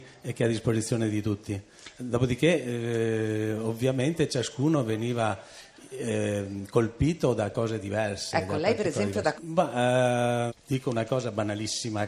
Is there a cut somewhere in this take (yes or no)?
yes